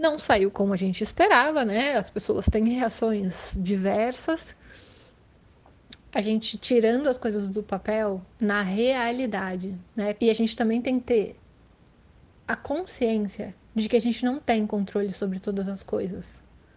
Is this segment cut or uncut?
cut